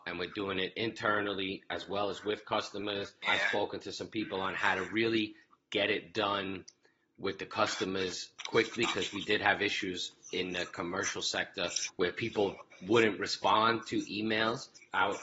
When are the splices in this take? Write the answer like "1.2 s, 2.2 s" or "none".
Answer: none